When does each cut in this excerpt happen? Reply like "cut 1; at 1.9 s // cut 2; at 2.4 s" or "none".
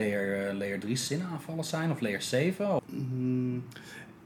cut 1; at 2.8 s